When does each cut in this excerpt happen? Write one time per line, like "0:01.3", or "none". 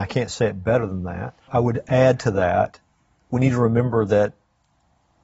0:01.4